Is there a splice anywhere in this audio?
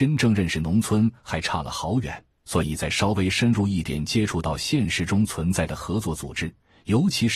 yes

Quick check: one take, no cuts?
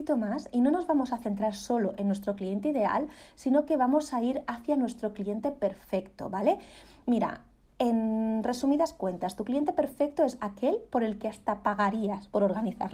no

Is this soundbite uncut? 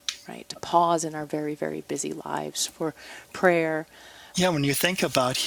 no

